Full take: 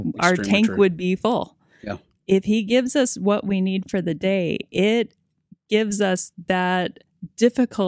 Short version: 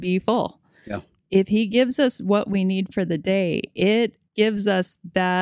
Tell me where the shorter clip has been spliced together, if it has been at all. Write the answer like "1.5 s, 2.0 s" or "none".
4.3 s